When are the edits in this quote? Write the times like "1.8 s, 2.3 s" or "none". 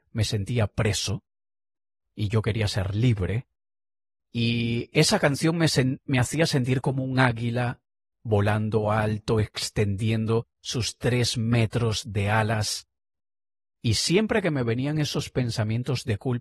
none